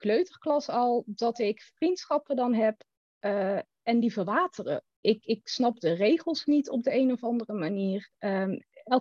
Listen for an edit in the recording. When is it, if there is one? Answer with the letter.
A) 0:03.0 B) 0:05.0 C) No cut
B